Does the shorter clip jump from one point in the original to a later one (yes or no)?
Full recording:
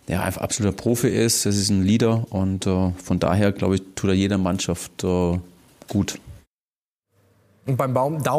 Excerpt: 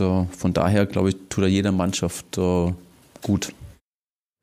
no